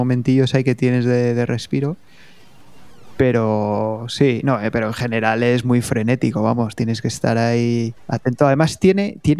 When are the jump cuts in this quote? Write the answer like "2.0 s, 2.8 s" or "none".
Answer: 8.0 s